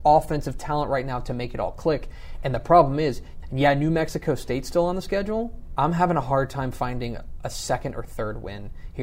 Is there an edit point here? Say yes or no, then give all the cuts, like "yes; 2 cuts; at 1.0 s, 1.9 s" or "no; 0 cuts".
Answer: yes; 2 cuts; at 3.4 s, 5.8 s